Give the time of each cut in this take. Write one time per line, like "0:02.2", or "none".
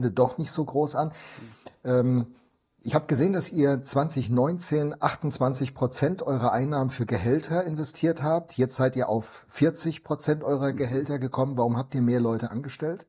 none